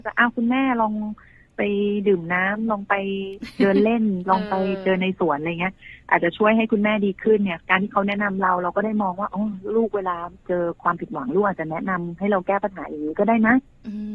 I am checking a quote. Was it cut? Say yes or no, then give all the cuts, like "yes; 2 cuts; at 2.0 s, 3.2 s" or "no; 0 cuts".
no; 0 cuts